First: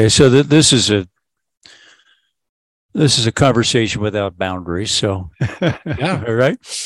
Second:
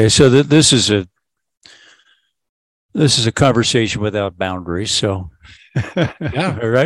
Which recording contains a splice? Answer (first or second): first